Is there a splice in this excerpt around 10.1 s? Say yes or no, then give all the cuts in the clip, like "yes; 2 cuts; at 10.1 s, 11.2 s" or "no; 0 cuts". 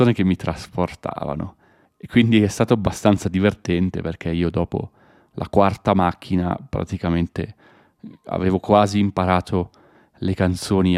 no; 1 cut; at 1.9 s